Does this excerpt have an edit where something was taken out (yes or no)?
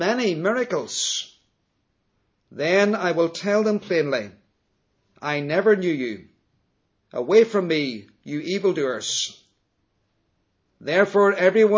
no